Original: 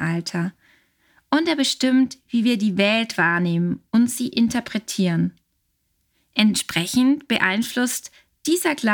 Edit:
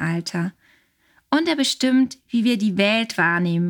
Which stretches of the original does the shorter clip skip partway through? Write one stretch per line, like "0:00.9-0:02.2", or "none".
none